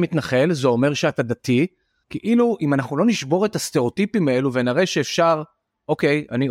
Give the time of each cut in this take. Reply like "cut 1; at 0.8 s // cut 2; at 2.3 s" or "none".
cut 1; at 2.0 s